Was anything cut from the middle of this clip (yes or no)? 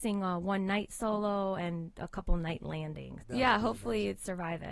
yes